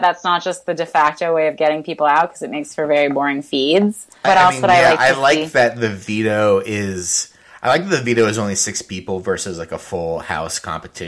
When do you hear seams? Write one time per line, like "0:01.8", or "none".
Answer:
0:04.2